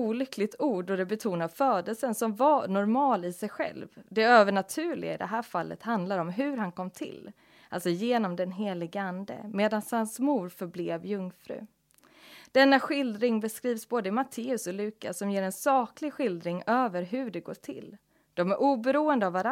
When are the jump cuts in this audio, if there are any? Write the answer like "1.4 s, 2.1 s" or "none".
none